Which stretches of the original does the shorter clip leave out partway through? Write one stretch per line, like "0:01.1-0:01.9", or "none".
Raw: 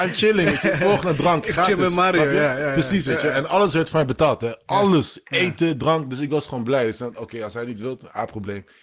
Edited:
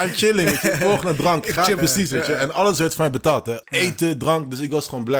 0:01.8-0:02.7
0:04.6-0:05.2